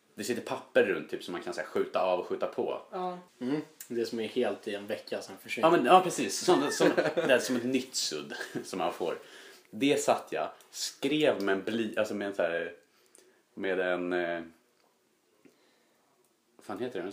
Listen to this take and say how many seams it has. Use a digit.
1